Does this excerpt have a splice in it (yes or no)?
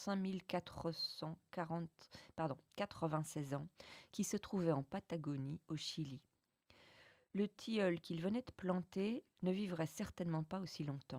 no